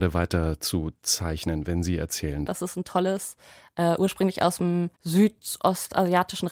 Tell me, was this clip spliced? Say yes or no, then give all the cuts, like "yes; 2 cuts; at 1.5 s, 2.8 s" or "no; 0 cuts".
yes; 2 cuts; at 2.5 s, 4.9 s